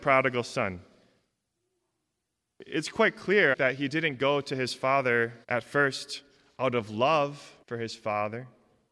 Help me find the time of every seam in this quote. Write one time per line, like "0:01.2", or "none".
0:03.5
0:05.4
0:07.6